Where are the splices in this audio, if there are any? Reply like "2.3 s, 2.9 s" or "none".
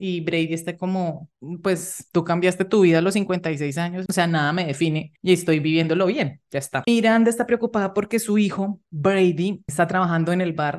4.1 s, 6.8 s